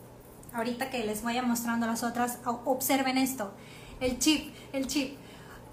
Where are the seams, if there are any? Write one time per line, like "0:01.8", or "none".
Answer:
0:04.0